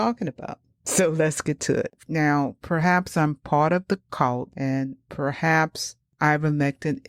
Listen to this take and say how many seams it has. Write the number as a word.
zero